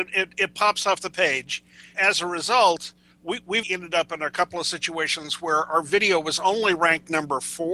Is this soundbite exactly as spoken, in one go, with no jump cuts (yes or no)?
no